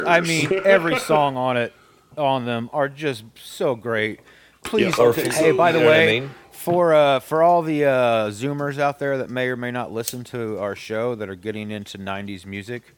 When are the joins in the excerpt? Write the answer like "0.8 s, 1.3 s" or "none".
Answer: 5.0 s